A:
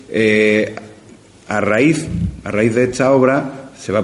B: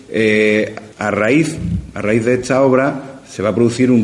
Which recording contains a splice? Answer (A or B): B